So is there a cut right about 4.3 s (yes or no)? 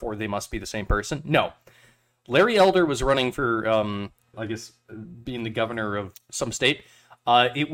yes